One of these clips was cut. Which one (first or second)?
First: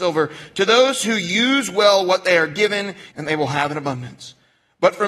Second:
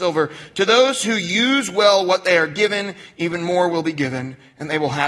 first